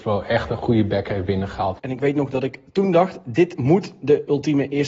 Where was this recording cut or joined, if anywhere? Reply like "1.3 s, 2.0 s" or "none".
1.8 s